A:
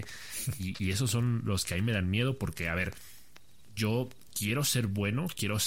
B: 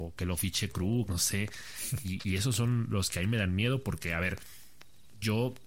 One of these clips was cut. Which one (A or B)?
B